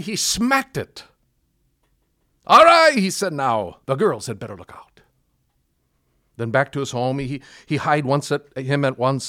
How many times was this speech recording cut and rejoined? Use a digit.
1